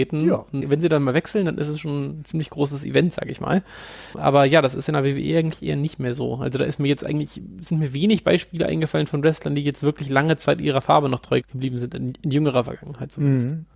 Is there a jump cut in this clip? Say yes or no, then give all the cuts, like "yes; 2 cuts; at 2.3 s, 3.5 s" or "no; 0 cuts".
no; 0 cuts